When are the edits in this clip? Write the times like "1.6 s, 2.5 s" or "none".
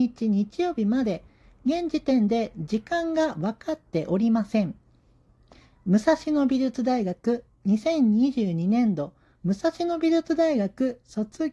none